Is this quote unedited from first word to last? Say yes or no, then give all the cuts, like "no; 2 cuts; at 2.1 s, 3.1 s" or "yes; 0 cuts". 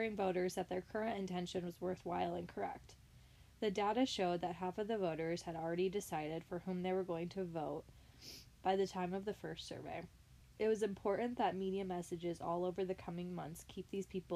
yes; 0 cuts